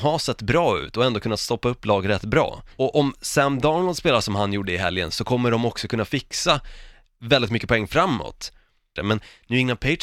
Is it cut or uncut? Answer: cut